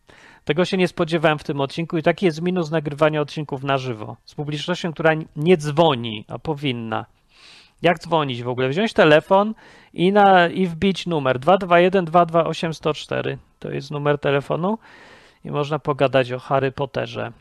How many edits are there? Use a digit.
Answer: 0